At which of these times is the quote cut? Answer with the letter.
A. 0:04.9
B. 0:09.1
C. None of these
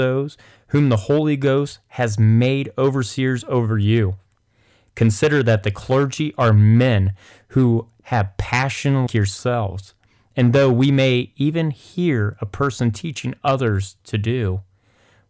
B